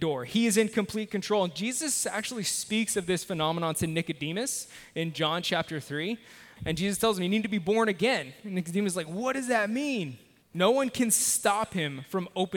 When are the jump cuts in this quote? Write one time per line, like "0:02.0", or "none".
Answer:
0:06.6
0:10.4